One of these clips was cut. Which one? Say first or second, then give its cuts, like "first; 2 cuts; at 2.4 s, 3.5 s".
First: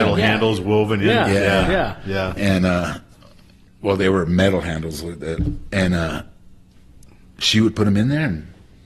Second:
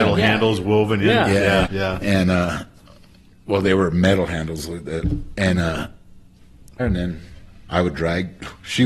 second; 2 cuts; at 1.7 s, 6.8 s